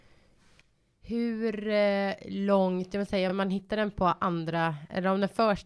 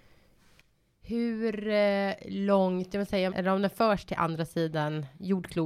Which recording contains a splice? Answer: second; 1 cut; at 3.3 s

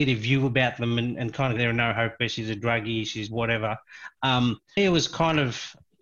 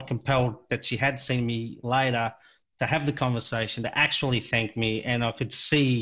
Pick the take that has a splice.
first; 2 cuts; at 1.6 s, 4.8 s

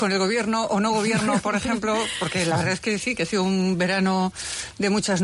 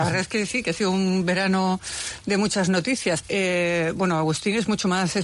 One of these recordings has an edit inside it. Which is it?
second; 1 cut; at 3.2 s

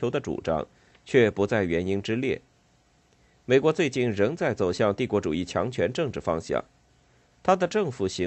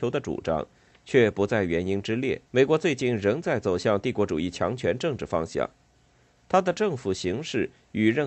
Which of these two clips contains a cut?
second; 1 cut; at 2.5 s

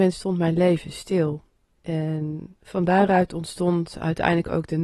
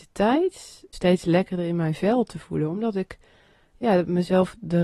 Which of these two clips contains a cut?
second; 1 cut; at 0.9 s

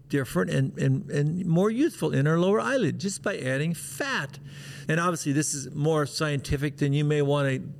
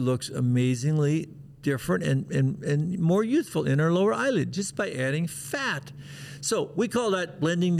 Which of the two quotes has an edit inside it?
first; 1 cut; at 4.9 s

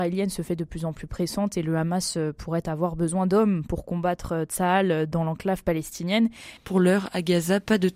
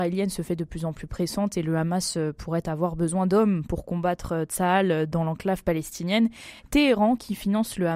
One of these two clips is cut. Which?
first; 1 cut; at 6.6 s

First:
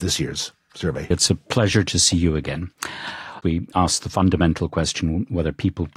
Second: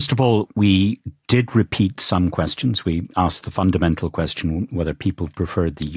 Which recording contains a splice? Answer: first; 2 cuts; at 1.1 s, 3.4 s

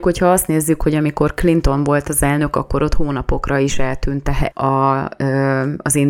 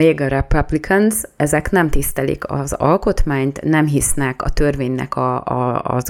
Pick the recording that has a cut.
first; 1 cut; at 4.5 s

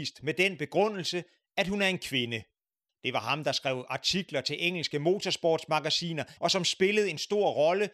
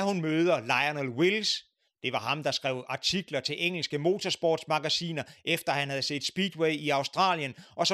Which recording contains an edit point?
first; 2 cuts; at 2.9 s, 6.4 s

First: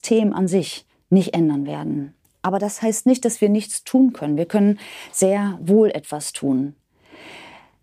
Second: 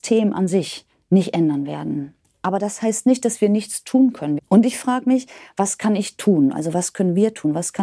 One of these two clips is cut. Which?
second; 1 cut; at 4.4 s

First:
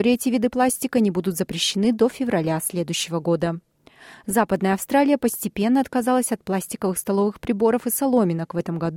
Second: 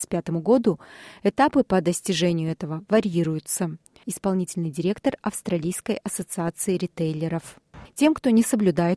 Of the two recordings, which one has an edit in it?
second; 2 cuts; at 4.0 s, 7.9 s

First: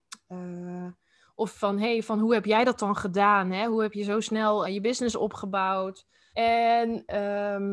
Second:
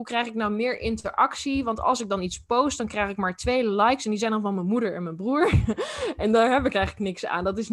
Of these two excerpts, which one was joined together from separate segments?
first; 2 cuts; at 4.7 s, 6.3 s

